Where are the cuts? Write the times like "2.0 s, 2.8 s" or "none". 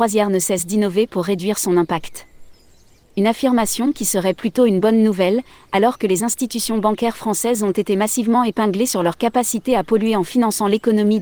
3.0 s